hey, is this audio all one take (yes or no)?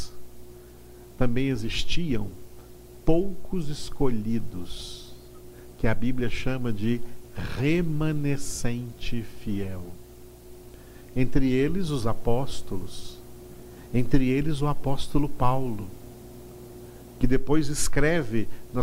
yes